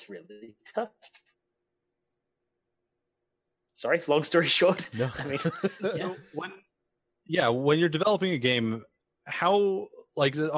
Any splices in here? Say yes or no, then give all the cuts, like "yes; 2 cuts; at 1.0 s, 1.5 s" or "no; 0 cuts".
no; 0 cuts